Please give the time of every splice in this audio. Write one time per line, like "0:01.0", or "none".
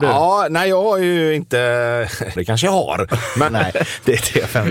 0:02.4
0:03.5